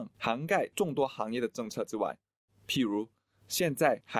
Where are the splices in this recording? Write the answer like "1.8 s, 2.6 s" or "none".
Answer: 2.5 s